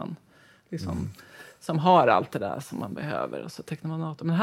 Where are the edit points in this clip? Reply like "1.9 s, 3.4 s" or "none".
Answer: none